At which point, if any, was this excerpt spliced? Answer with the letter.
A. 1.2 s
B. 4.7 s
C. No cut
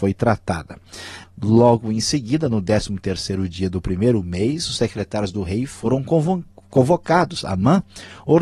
A